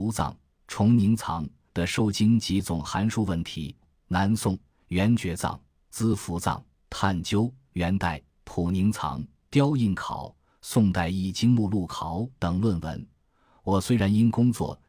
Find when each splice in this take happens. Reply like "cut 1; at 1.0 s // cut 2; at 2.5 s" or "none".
cut 1; at 3.8 s